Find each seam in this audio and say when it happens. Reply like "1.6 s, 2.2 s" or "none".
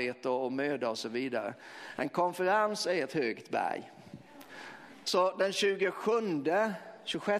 5.0 s